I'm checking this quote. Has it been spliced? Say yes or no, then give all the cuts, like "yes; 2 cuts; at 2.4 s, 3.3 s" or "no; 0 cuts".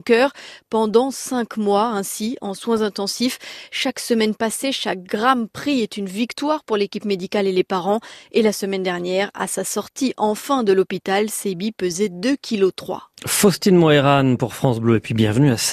no; 0 cuts